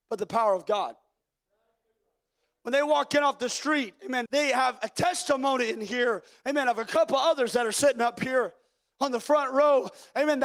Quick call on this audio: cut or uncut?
cut